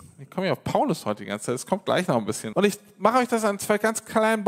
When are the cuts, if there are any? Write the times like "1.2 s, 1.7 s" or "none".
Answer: 2.5 s